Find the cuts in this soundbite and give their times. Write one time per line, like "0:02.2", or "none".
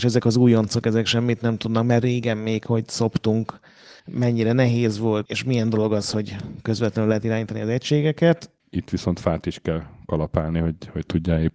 0:04.0
0:05.3
0:08.6